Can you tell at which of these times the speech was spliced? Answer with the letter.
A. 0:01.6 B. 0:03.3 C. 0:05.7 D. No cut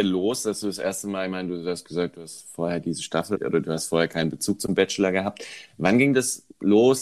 B